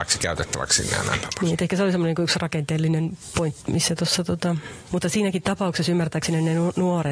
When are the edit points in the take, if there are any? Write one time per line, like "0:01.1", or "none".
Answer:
0:03.6
0:04.9